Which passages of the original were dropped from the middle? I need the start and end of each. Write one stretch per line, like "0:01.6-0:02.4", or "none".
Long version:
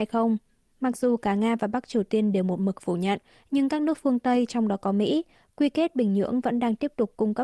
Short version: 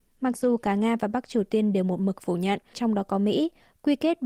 0:03.3-0:04.5